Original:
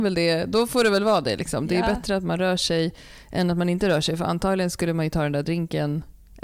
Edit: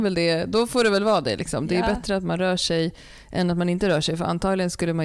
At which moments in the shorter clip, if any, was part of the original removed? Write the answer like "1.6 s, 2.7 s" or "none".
none